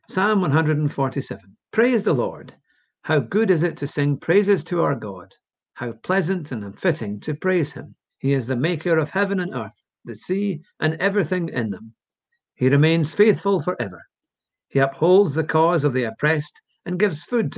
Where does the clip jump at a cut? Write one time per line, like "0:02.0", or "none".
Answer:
0:01.6
0:08.1